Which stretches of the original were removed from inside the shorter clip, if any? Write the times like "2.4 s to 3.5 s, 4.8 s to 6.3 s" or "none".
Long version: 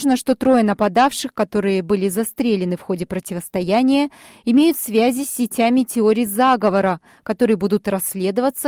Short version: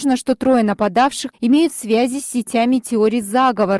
1.3 s to 4.4 s